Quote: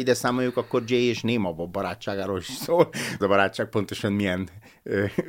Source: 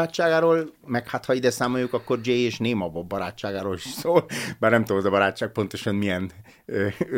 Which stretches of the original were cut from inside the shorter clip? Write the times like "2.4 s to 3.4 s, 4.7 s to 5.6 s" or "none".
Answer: 4.6 s to 5.0 s